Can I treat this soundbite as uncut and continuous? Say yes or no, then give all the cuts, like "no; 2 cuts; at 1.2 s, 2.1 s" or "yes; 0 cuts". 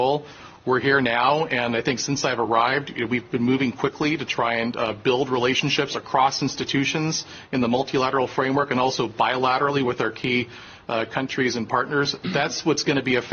yes; 0 cuts